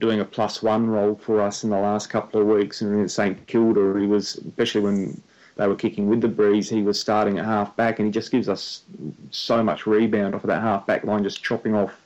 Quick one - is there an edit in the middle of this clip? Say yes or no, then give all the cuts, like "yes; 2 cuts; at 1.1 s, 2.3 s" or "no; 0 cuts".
no; 0 cuts